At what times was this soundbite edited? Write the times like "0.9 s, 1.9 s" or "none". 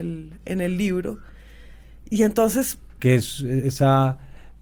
3.0 s